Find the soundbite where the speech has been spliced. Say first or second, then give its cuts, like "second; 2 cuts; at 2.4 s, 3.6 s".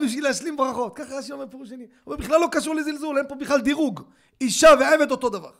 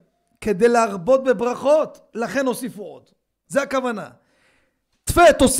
second; 1 cut; at 3.4 s